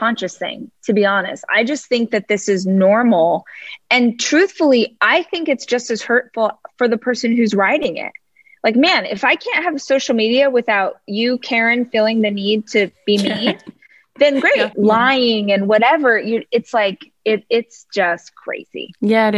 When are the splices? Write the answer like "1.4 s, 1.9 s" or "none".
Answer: 14.7 s